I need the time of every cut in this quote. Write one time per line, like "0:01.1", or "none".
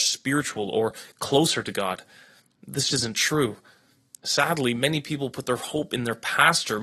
0:02.9